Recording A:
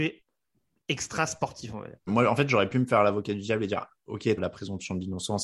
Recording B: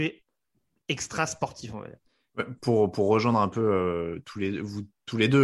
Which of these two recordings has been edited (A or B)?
A